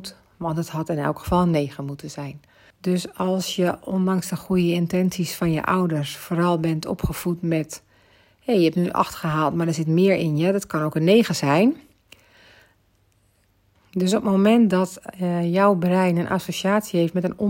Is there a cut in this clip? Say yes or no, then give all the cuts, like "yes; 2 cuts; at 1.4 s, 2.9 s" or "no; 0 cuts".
yes; 2 cuts; at 2.7 s, 13.8 s